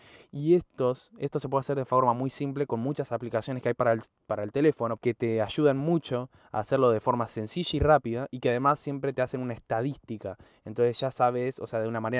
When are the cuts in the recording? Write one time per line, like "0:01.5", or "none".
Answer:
0:05.0